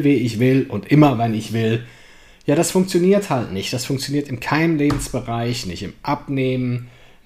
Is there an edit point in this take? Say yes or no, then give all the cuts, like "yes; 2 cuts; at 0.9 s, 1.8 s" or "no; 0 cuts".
no; 0 cuts